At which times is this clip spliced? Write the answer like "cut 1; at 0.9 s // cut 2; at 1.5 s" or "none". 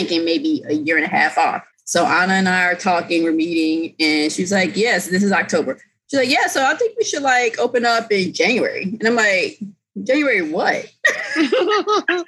none